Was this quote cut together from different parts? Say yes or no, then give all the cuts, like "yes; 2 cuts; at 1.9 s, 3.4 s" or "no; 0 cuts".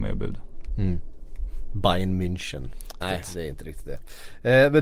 yes; 1 cut; at 3.0 s